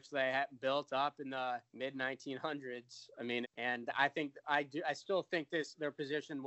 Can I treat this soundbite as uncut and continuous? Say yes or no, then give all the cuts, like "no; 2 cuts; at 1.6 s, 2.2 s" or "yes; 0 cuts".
no; 2 cuts; at 1.7 s, 3.4 s